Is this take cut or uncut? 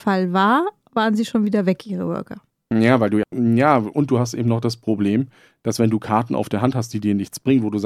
cut